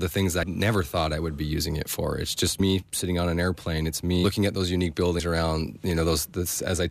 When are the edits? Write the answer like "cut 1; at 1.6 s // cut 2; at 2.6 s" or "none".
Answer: cut 1; at 4.2 s